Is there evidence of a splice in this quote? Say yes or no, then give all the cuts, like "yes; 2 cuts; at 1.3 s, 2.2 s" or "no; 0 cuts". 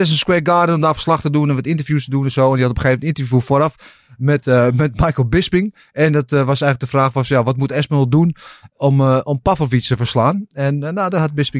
no; 0 cuts